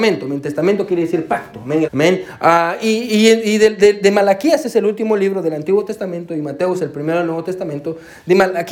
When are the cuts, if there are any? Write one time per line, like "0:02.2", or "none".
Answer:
0:01.8